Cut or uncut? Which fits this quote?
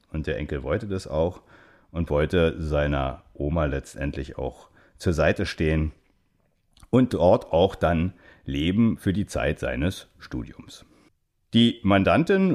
uncut